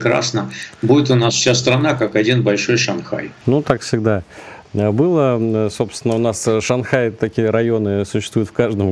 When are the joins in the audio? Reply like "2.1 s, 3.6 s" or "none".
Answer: 3.4 s